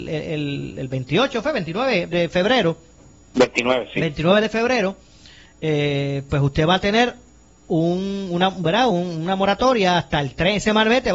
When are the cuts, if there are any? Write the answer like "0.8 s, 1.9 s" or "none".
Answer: none